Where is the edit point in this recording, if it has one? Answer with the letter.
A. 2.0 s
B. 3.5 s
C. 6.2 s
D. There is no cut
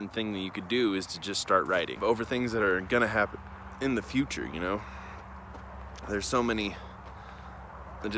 A